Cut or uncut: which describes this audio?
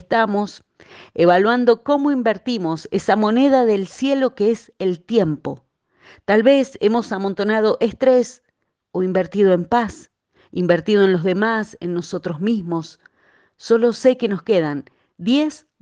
uncut